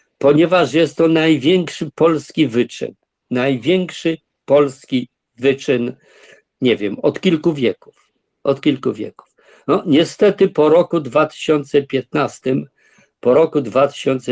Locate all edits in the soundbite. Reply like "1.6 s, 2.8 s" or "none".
none